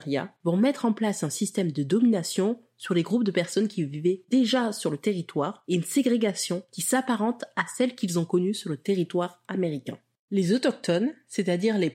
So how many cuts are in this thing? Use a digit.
0